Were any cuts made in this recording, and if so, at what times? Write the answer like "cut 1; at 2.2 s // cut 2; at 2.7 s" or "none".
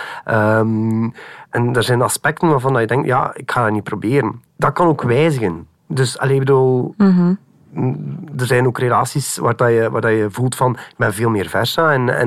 cut 1; at 5.8 s